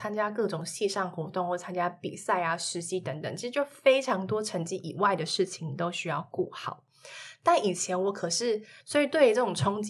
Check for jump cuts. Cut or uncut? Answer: cut